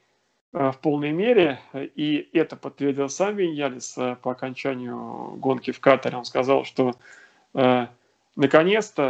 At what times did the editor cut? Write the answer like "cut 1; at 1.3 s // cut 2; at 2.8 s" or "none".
none

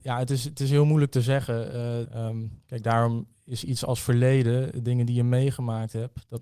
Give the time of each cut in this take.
cut 1; at 2.1 s

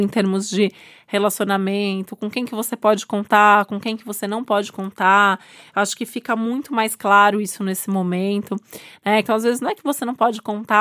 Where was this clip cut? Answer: cut 1; at 9.2 s

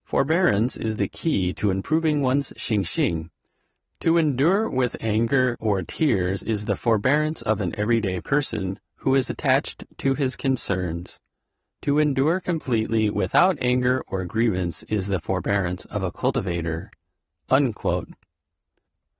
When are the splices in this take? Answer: cut 1; at 5.6 s

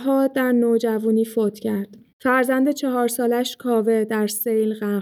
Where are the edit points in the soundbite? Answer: cut 1; at 2.1 s

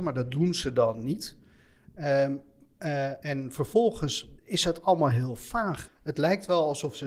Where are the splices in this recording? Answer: cut 1; at 3.2 s // cut 2; at 4.4 s

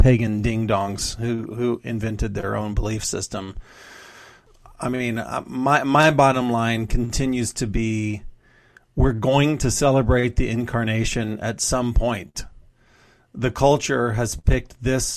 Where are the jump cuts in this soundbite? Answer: none

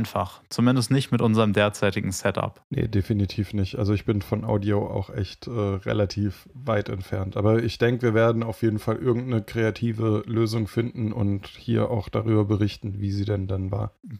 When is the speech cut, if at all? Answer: cut 1; at 2.6 s

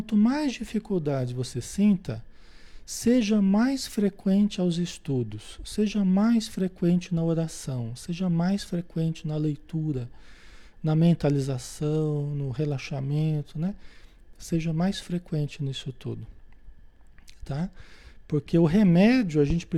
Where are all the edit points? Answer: none

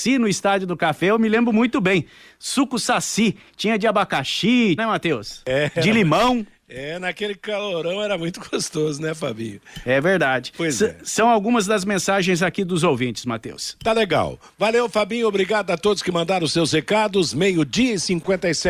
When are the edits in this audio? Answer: cut 1; at 4.8 s

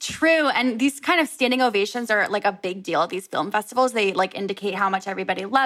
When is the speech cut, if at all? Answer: none

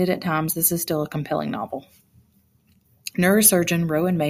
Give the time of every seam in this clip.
cut 1; at 3.1 s

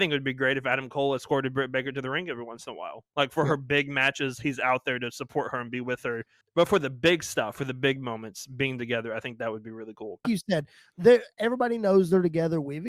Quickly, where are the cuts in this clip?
cut 1; at 6.4 s // cut 2; at 10.2 s

